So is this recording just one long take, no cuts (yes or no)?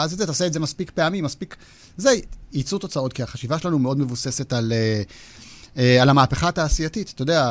yes